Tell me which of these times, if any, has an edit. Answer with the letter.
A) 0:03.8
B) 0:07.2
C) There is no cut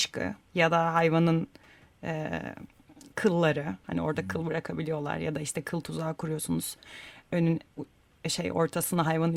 A